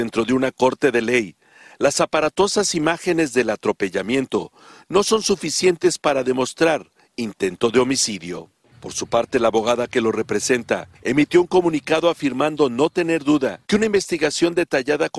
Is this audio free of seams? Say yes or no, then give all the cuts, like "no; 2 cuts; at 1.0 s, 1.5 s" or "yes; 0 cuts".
no; 3 cuts; at 8.7 s, 10.9 s, 13.6 s